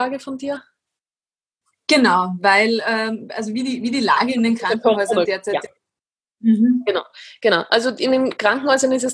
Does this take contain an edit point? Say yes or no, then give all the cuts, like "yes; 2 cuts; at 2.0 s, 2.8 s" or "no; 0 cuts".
no; 0 cuts